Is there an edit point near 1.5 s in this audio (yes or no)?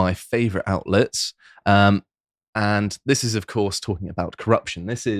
no